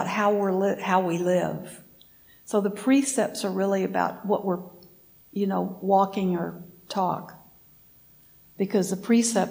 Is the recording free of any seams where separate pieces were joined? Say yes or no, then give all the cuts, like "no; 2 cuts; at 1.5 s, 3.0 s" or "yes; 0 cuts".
yes; 0 cuts